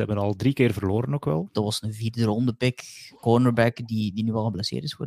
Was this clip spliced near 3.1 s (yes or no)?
no